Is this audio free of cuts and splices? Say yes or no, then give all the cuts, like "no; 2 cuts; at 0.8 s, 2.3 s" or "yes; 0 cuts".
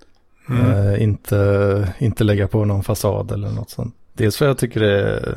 no; 1 cut; at 4.0 s